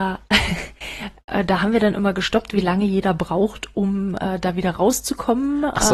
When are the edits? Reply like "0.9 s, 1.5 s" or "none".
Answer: none